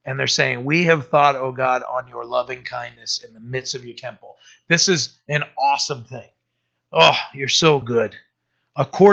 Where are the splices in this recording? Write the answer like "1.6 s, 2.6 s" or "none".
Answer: 6.8 s, 7.8 s